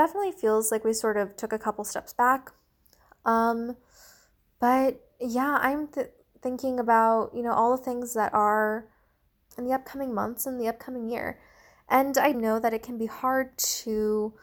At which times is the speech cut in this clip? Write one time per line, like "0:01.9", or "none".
0:09.5
0:12.3